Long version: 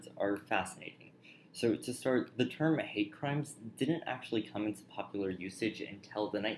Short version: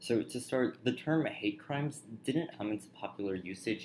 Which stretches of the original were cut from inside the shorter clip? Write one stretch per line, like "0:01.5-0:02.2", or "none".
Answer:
0:04.0-0:04.5